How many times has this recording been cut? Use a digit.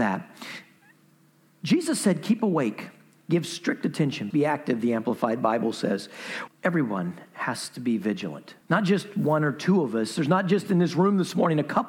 3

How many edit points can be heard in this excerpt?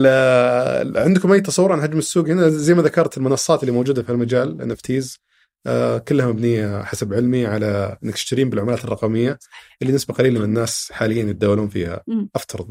0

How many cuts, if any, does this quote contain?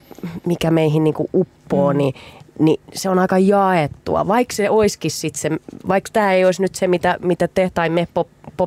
0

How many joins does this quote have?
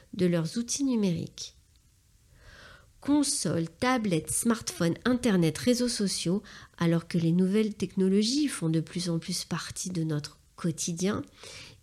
0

